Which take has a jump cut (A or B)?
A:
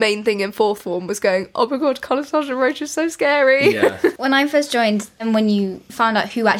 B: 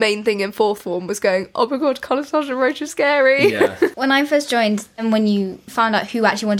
B